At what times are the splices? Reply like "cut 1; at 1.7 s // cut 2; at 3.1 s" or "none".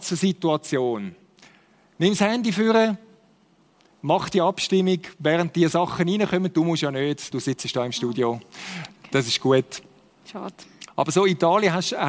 cut 1; at 7.3 s